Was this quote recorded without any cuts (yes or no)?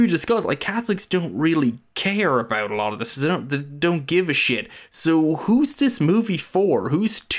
yes